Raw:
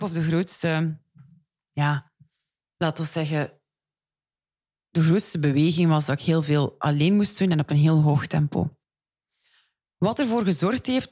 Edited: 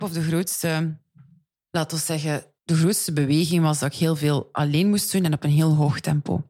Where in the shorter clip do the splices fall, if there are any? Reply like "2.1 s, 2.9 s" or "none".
1.5 s, 2.6 s

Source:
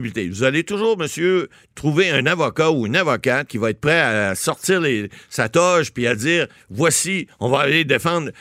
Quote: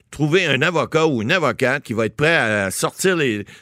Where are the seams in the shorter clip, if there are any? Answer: none

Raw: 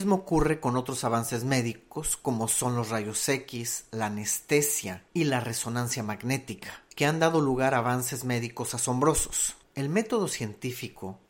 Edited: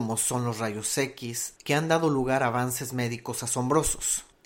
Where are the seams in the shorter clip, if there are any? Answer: 1.6 s

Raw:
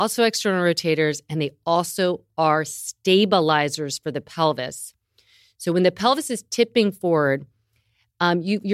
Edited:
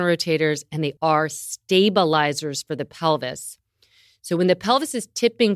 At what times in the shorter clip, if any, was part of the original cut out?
1.0 s

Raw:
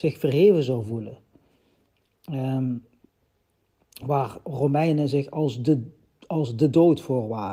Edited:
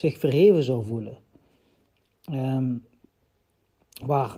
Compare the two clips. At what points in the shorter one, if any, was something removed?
none

